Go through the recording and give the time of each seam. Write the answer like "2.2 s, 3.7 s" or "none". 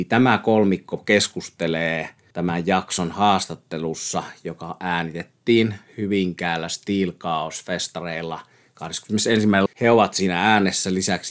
9.7 s